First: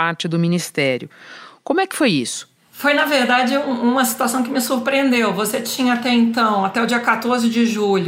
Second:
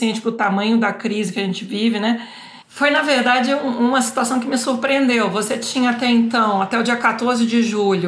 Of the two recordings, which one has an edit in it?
second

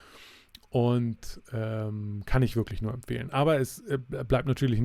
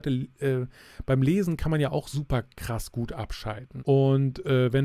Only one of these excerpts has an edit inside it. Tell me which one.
second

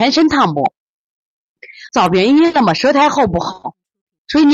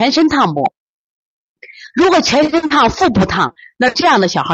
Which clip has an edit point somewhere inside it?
first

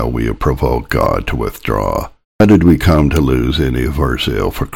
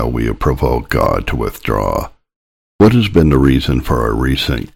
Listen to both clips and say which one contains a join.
first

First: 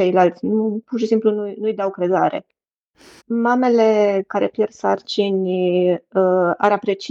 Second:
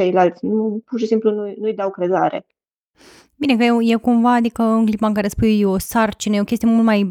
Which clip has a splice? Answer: first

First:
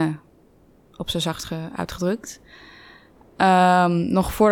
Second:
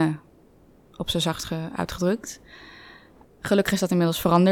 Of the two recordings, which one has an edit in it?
second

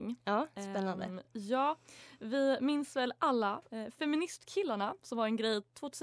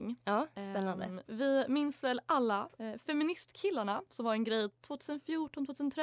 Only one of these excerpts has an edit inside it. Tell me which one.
second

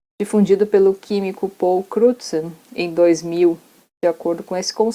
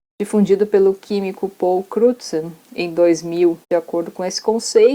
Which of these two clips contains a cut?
second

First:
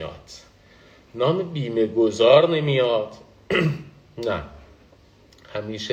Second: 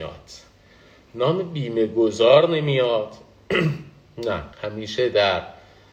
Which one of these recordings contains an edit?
second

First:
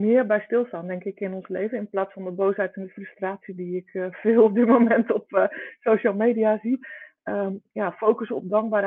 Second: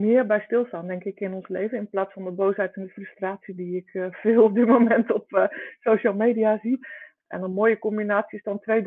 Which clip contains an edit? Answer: second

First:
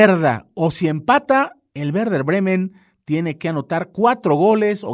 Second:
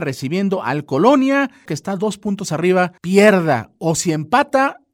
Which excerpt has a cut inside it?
second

